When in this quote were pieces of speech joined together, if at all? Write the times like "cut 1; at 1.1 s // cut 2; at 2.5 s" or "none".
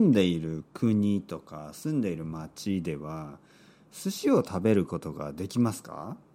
none